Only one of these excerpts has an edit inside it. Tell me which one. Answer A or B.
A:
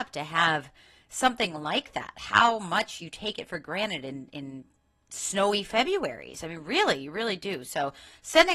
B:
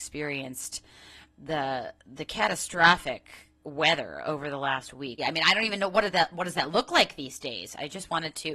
B